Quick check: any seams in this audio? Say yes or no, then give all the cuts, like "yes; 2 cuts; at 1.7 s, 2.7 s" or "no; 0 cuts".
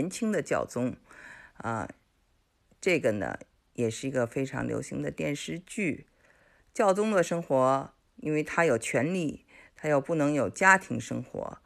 no; 0 cuts